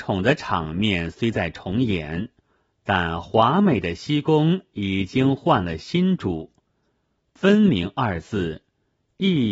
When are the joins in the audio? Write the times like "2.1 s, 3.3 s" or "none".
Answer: none